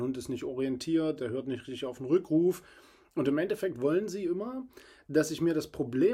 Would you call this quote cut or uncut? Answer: cut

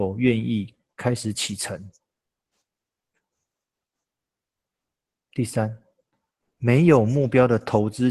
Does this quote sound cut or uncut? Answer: uncut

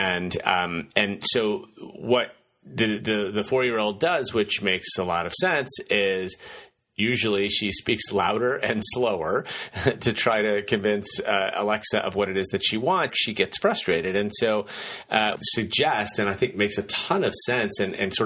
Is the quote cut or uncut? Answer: cut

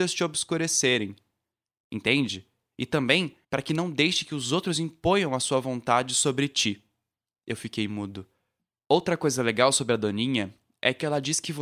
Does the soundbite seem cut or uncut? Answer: cut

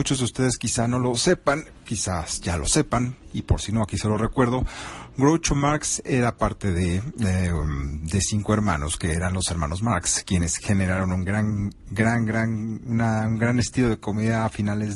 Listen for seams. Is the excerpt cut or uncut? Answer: uncut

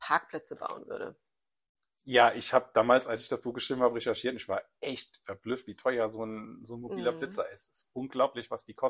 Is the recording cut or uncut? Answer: uncut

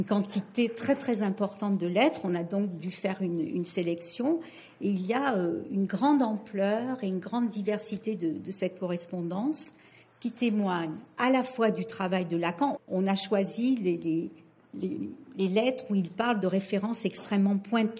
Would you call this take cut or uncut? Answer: cut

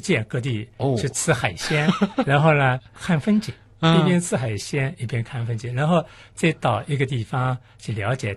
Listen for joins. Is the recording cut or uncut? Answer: uncut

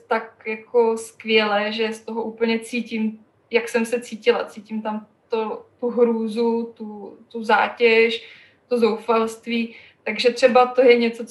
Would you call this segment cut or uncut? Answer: uncut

